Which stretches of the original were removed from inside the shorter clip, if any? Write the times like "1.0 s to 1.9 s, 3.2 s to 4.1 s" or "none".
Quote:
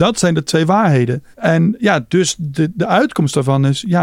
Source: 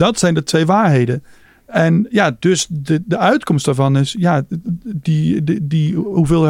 1.3 s to 1.6 s